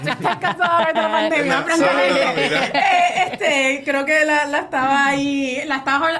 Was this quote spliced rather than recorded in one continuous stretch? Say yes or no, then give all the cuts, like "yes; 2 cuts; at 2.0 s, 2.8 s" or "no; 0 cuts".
no; 0 cuts